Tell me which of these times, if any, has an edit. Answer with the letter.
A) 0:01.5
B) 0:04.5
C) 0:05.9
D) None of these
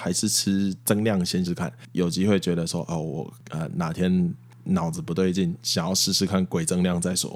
A